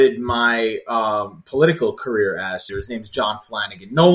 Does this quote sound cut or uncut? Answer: cut